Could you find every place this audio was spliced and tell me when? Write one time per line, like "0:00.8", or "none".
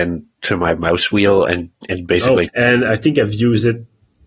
0:02.5